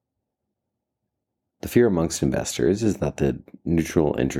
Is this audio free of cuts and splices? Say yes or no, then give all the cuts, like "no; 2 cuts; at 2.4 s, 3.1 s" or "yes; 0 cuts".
yes; 0 cuts